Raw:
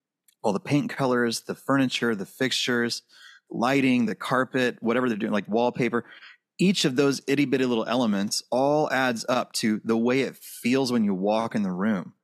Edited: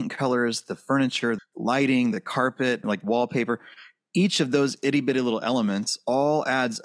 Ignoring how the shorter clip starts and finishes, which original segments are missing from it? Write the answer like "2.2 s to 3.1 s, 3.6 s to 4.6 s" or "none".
2.2 s to 3.3 s, 4.8 s to 5.3 s